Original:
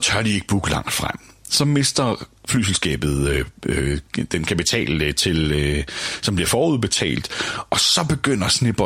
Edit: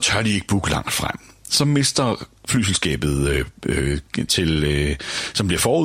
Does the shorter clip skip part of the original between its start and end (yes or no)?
yes